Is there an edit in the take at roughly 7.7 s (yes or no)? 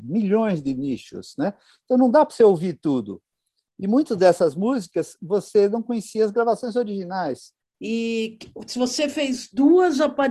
yes